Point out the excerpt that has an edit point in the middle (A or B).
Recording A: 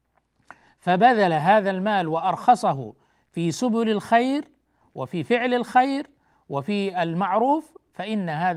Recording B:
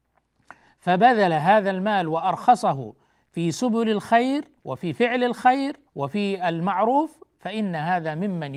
B